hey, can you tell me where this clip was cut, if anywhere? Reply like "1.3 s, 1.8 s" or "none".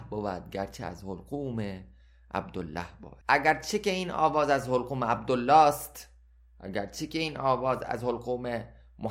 3.2 s